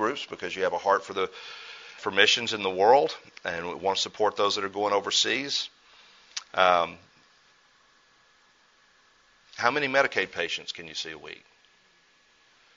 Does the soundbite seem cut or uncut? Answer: cut